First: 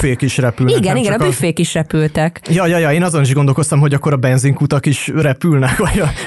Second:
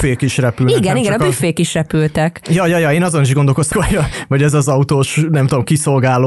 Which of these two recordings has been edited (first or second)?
second